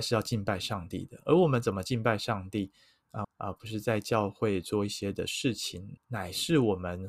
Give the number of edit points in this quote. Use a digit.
2